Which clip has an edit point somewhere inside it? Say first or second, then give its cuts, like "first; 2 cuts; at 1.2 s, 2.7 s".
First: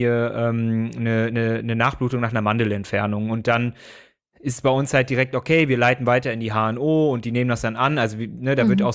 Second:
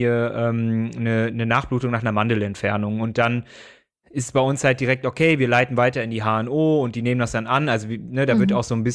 second; 1 cut; at 1.3 s